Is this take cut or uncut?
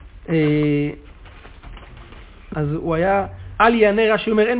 cut